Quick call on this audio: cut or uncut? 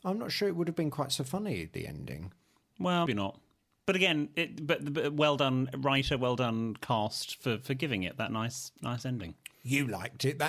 cut